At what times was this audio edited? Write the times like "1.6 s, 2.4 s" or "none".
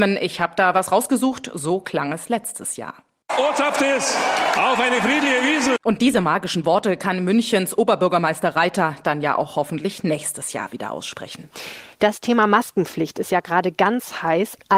11.9 s